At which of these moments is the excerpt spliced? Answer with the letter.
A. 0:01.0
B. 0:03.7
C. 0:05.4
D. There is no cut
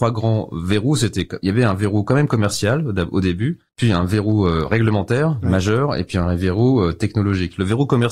B